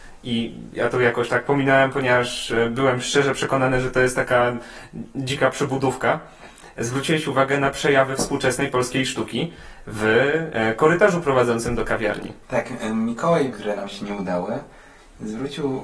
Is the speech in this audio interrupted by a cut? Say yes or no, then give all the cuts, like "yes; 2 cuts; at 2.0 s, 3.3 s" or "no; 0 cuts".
yes; 2 cuts; at 12.4 s, 13.5 s